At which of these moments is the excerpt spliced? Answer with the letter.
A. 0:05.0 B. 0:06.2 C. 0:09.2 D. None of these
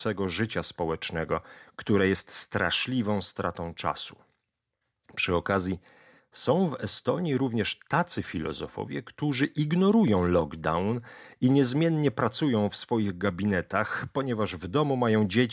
B